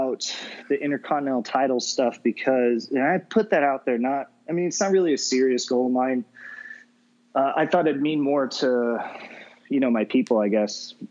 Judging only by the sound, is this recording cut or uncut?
uncut